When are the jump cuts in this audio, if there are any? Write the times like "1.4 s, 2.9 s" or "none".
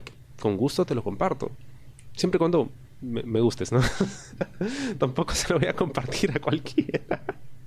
none